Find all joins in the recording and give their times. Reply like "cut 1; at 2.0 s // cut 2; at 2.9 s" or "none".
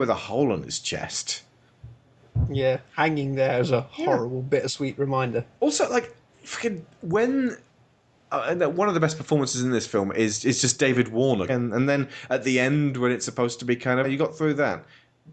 cut 1; at 11.5 s // cut 2; at 14.0 s